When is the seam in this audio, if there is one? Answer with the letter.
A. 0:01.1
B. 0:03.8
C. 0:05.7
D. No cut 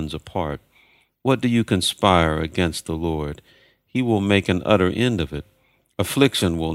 A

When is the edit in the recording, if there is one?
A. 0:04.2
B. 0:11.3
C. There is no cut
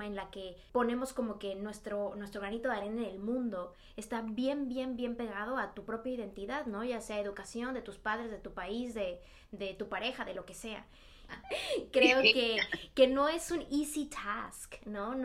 B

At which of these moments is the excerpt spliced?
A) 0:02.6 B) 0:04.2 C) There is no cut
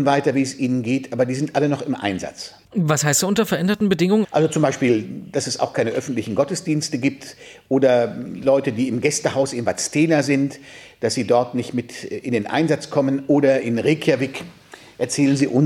B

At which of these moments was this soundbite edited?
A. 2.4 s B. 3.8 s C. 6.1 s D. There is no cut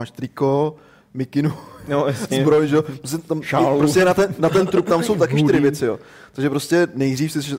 D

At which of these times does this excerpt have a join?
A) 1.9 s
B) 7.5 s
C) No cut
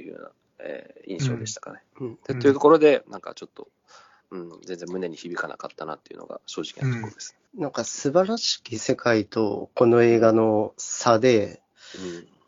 B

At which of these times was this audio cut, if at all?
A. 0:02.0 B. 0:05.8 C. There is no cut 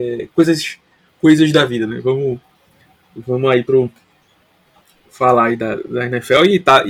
B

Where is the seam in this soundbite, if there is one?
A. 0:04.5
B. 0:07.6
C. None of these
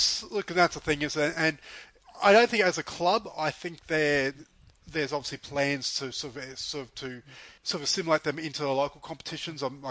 B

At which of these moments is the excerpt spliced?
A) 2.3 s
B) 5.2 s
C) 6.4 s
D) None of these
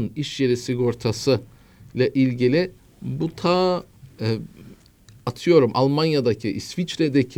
C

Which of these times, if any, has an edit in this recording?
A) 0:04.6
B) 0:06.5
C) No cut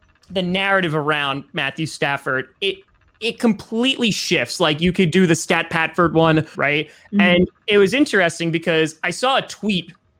B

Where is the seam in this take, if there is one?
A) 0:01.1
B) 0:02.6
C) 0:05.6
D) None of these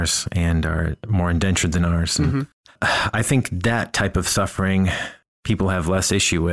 D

